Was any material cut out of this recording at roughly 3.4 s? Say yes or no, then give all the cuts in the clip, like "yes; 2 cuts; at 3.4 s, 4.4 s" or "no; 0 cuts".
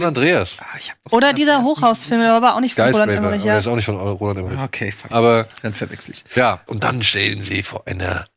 no; 2 cuts; at 5.1 s, 6.7 s